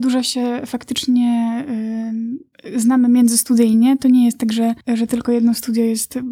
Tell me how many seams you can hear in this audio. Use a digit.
1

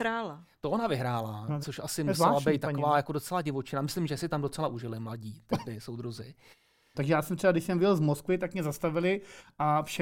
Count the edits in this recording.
2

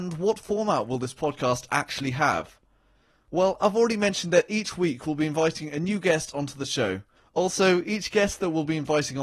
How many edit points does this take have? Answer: 1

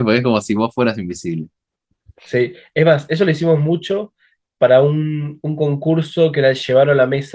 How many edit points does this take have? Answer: 0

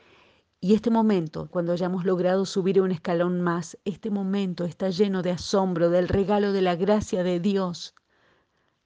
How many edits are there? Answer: 1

